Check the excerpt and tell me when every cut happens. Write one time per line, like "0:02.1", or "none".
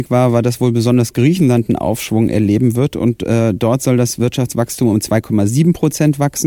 none